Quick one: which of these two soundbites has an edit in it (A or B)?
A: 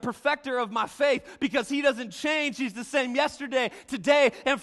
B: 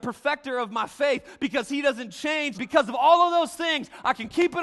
B